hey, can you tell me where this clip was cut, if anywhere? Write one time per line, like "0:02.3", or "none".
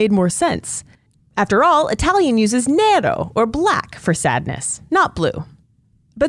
none